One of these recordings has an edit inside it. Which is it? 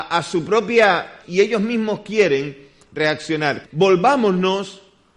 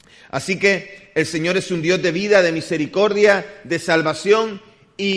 first; 2 cuts; at 1.2 s, 3.6 s

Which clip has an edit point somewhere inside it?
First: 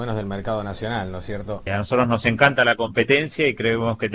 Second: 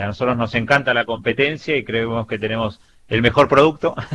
first; 1 cut; at 1.7 s

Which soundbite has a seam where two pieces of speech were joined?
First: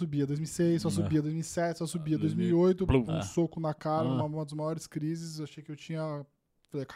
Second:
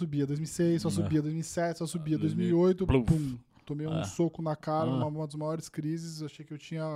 first; 1 cut; at 3.1 s

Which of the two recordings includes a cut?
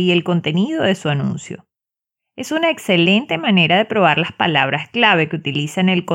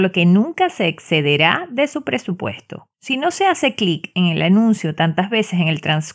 second; 1 cut; at 2.9 s

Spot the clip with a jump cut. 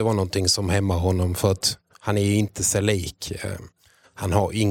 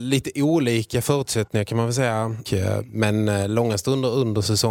second; 1 cut; at 2.5 s

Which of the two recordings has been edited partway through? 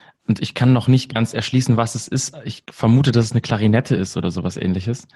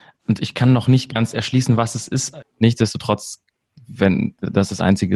second; 1 cut; at 2.4 s

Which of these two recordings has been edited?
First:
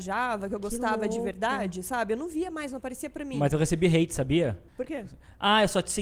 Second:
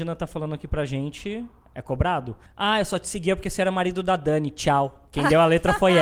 second; 1 cut; at 2.5 s

